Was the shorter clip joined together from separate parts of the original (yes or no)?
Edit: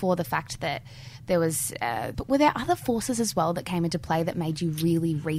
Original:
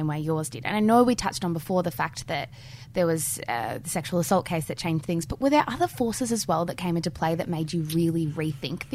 yes